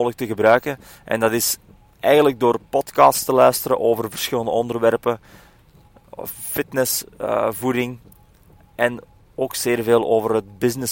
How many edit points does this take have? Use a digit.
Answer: 0